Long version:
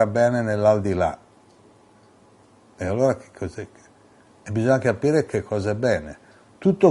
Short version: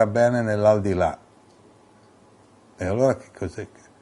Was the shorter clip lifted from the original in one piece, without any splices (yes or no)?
yes